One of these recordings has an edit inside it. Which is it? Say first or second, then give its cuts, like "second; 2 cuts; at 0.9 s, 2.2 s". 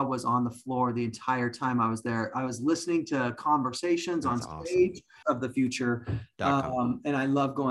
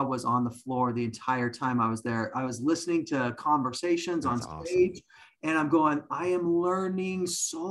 first; 1 cut; at 5.2 s